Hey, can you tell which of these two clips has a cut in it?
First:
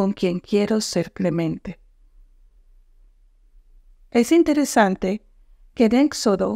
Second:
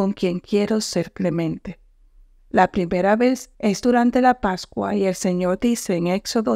second; 2 cuts; at 2.4 s, 3.5 s

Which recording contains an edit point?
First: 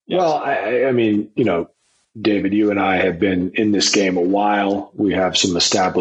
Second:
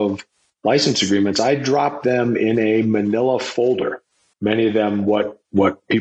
second; 1 cut; at 4.3 s

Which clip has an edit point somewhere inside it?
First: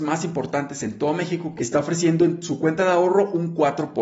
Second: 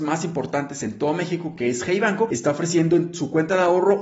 first; 1 cut; at 1.6 s

